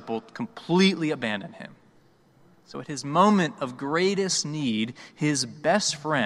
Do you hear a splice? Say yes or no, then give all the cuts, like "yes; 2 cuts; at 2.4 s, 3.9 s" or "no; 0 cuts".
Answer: no; 0 cuts